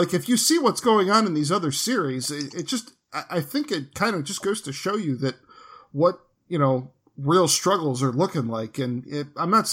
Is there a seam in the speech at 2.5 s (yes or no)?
no